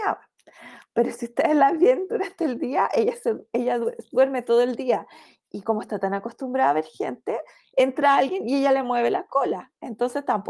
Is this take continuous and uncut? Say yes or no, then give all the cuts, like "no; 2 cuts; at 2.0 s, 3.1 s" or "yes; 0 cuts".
yes; 0 cuts